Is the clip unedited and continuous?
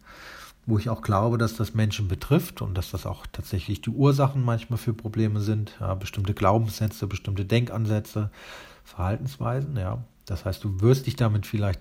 yes; 0 cuts

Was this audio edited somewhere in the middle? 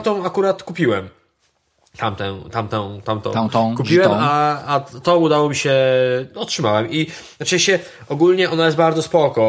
no; 0 cuts

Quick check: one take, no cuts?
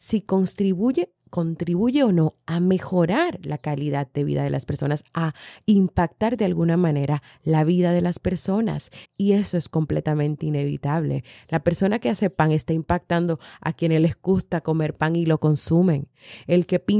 no; 1 cut; at 9.0 s

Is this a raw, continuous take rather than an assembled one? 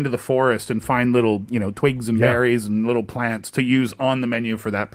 yes; 0 cuts

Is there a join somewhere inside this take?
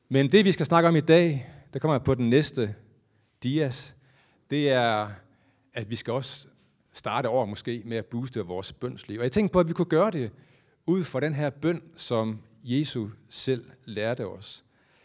no; 0 cuts

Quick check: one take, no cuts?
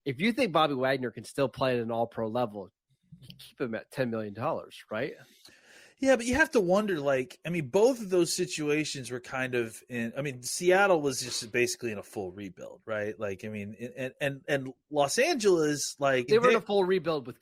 no; 1 cut; at 16.3 s

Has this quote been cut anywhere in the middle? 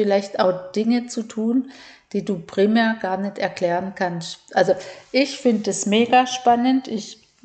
no; 0 cuts

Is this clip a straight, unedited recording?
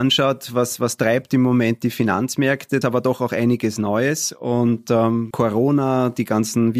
no; 2 cuts; at 2.8 s, 5.3 s

